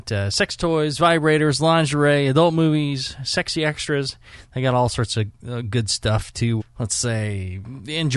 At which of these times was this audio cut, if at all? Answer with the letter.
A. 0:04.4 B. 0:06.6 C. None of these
B